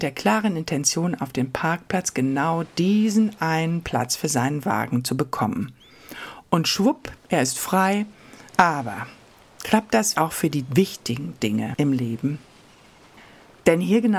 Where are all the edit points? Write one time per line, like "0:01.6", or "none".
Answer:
0:08.5
0:10.2